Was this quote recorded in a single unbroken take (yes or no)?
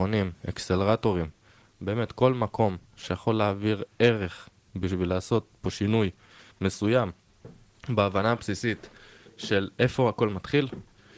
yes